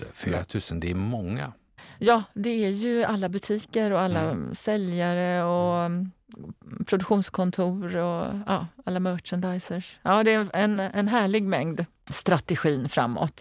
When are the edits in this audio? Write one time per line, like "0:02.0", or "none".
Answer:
0:10.8
0:12.0

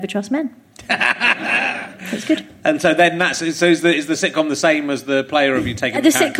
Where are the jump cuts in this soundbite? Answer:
none

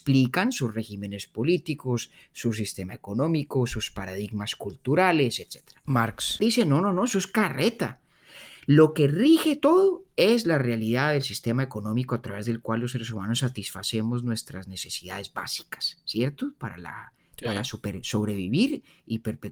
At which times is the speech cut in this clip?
none

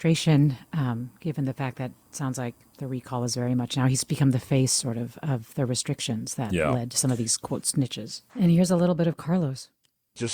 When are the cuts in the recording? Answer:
0:08.3

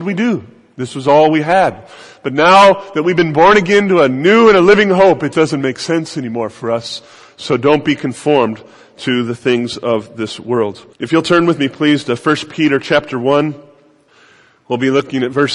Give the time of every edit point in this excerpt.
0:05.3
0:10.9

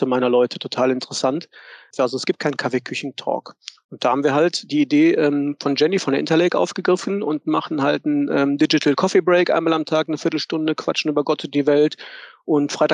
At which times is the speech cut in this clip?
0:01.9

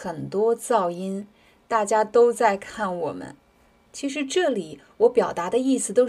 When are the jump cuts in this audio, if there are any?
0:03.8

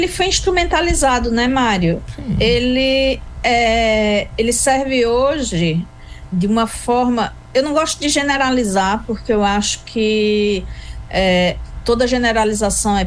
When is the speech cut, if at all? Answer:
0:06.3

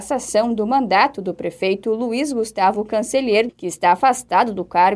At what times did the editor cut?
0:03.5

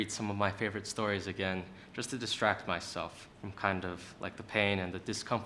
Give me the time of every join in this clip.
0:03.3

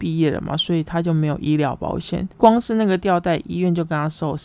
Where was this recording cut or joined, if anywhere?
0:02.3

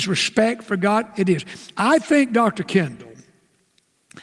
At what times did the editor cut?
none

